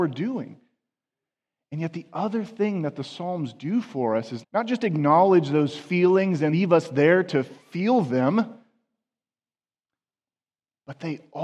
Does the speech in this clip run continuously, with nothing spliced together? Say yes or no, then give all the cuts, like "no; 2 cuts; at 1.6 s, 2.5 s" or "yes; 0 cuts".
no; 2 cuts; at 4.4 s, 6.5 s